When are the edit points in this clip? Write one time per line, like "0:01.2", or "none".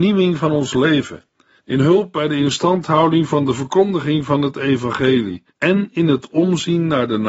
0:01.6
0:05.5